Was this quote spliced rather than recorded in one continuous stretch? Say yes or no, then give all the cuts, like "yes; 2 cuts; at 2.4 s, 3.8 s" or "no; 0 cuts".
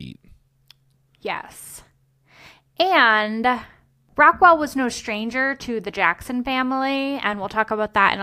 no; 0 cuts